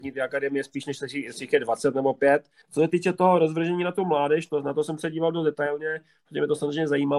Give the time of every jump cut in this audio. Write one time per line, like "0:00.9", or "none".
0:02.6